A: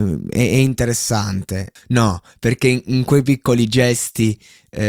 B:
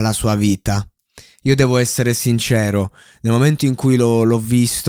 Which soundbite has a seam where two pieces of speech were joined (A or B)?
A